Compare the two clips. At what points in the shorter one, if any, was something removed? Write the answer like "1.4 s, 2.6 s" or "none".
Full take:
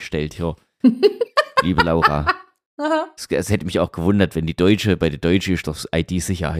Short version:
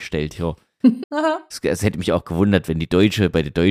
1.0 s

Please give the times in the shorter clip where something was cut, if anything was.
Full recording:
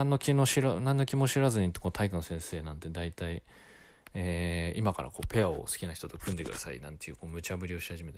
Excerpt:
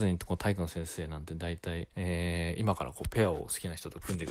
1.9 s

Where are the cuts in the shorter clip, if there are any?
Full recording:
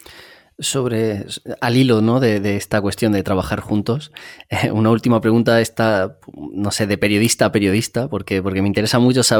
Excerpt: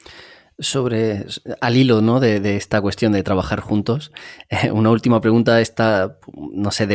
none

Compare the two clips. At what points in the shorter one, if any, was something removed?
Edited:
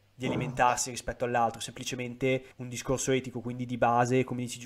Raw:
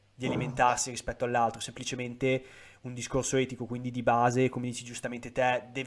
2.5 s

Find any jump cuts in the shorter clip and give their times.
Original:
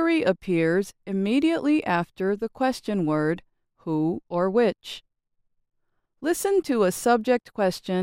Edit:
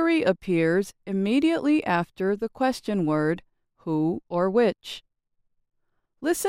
none

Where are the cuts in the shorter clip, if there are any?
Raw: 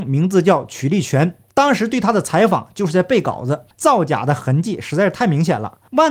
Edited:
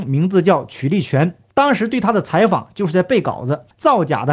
none

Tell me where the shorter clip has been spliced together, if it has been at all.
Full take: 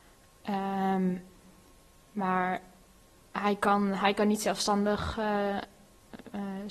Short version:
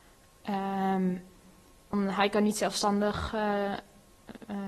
1.9 s

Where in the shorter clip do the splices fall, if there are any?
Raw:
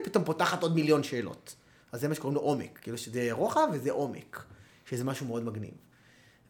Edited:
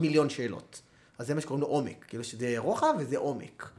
none

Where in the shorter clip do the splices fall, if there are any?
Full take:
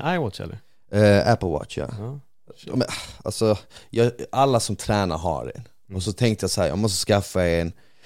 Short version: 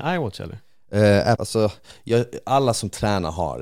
1.3 s

